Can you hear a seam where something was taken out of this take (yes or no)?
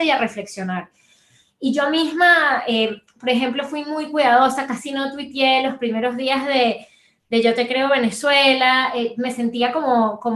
no